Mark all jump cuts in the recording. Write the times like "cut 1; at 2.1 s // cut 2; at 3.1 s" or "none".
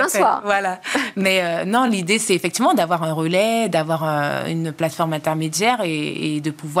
none